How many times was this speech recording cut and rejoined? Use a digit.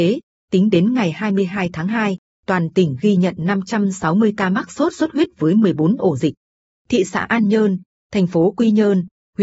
0